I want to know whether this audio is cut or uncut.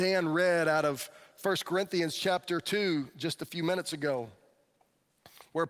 uncut